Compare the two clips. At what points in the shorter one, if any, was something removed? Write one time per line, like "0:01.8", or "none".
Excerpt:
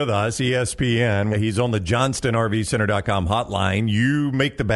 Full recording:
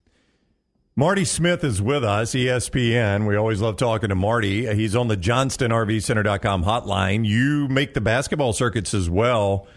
0:01.3

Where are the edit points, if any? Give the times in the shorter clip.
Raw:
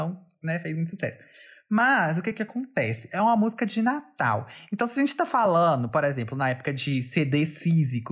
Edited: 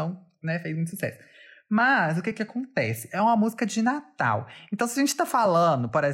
none

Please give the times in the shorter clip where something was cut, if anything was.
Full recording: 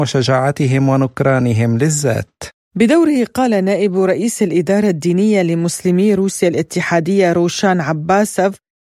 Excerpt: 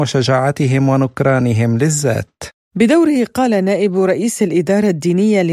none

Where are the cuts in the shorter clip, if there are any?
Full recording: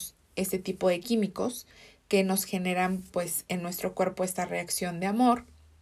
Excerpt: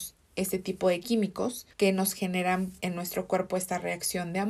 0:01.7
0:02.8

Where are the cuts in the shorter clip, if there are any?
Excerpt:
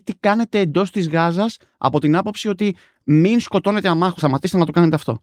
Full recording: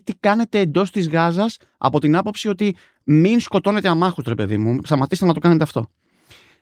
0:04.2

